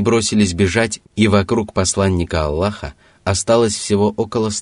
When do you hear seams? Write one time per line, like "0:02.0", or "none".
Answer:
0:01.0